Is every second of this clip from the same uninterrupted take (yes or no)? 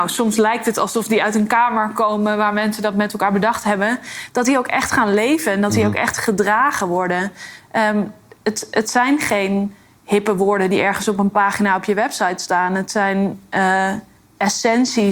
yes